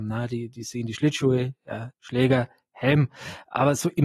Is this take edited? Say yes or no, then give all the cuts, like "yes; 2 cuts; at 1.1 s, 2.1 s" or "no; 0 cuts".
yes; 1 cut; at 1.9 s